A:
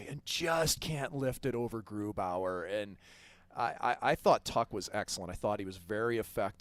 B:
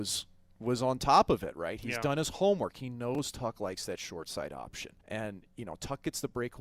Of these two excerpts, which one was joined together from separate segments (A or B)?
B